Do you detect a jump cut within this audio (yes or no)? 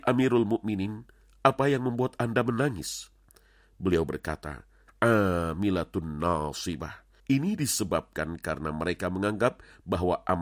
yes